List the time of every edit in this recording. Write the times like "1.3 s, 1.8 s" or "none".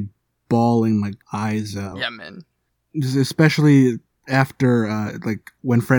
none